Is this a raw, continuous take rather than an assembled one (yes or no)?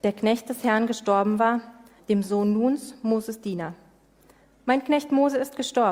no